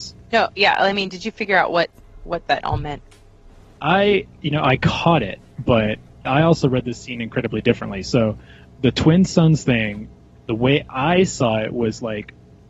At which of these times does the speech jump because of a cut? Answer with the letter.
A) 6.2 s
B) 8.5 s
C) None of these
A